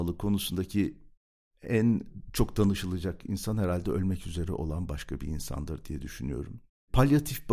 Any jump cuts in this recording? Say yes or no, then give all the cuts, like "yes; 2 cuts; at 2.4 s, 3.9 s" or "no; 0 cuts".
no; 0 cuts